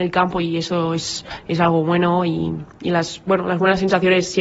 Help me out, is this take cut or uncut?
uncut